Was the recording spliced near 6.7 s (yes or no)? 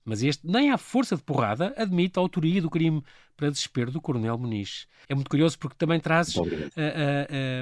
no